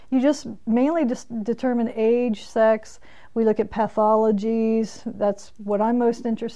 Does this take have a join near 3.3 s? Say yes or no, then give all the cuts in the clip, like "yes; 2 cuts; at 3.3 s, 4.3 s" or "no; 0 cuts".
no; 0 cuts